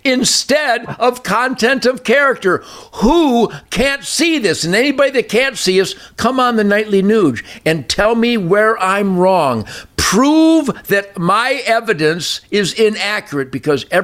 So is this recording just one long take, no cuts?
yes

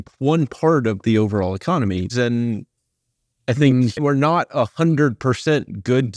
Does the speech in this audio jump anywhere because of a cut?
yes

